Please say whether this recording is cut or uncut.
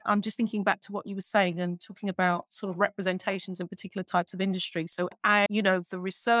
uncut